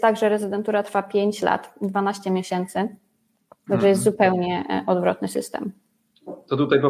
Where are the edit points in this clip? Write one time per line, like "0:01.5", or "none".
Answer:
0:03.7